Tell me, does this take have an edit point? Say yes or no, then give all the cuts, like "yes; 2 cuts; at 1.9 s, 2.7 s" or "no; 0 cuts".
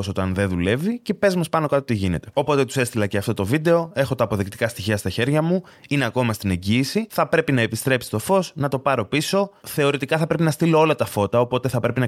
no; 0 cuts